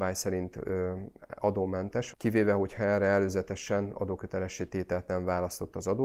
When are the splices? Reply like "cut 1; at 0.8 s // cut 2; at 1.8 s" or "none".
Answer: cut 1; at 2.1 s